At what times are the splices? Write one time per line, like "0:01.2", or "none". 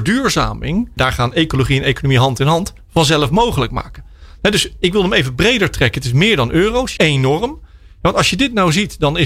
0:01.0
0:07.0